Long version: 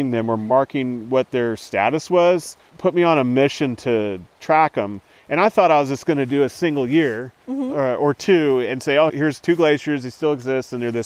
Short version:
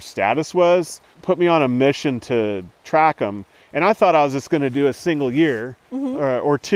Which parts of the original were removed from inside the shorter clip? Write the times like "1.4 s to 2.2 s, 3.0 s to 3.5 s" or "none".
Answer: none